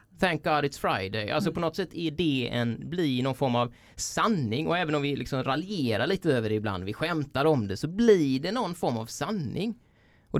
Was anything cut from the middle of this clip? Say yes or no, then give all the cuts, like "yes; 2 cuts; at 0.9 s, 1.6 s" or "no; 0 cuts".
no; 0 cuts